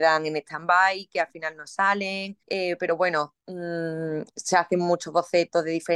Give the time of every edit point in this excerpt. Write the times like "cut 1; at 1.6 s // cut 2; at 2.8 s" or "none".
cut 1; at 2.4 s